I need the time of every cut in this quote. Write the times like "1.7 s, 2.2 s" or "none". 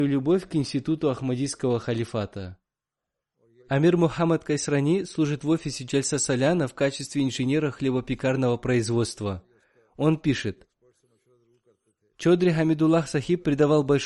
3.6 s